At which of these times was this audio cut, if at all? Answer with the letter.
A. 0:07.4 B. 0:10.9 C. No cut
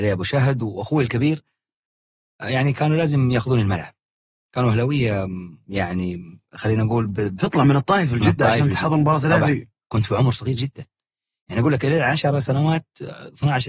A